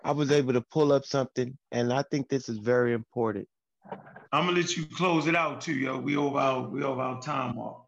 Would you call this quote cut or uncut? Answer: cut